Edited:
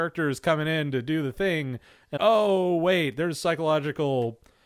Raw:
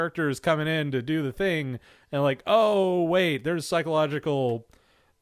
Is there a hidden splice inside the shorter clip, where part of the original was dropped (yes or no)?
yes